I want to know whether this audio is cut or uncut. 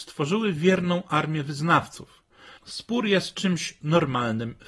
cut